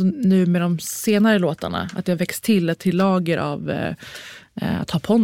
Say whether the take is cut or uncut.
uncut